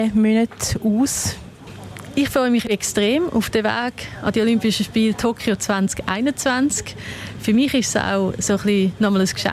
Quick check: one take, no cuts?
yes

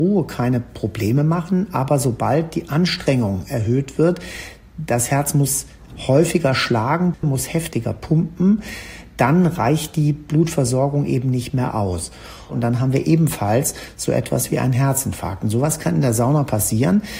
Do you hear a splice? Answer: no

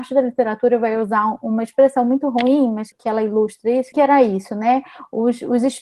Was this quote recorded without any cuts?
no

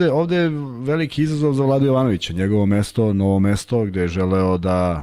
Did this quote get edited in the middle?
no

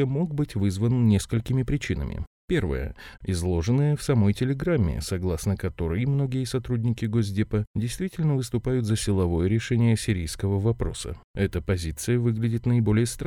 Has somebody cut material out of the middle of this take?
yes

